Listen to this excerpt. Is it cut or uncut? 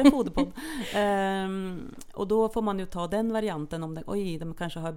uncut